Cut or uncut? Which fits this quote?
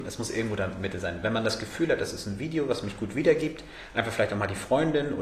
uncut